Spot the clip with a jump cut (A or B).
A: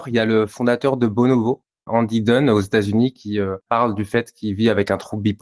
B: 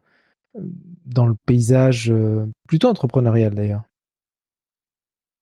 A